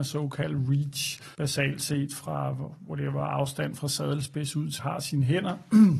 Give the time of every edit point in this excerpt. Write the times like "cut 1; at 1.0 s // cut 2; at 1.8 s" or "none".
cut 1; at 1.3 s // cut 2; at 4.8 s